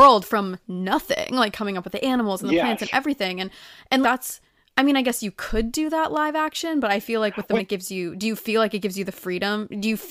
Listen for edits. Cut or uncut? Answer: cut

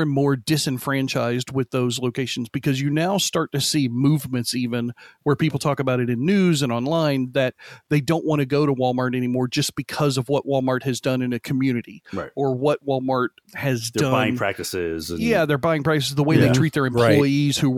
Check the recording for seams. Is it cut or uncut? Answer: uncut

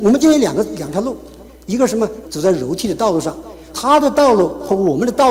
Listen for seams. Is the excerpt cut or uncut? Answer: cut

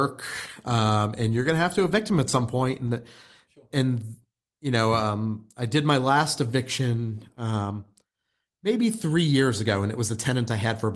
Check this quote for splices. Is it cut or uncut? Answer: uncut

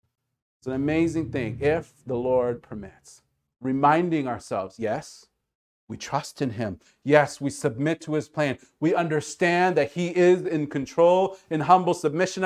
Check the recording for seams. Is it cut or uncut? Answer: uncut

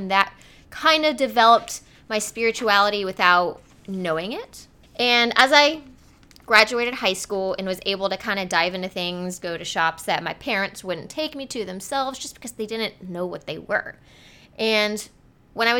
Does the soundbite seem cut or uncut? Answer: cut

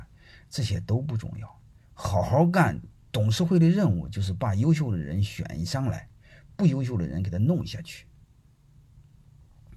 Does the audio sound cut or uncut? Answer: uncut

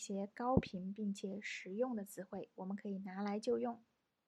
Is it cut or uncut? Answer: uncut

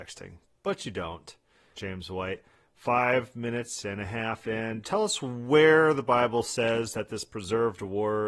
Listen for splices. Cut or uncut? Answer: cut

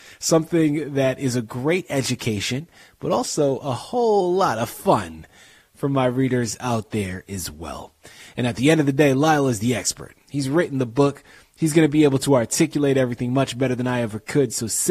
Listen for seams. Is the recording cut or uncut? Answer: uncut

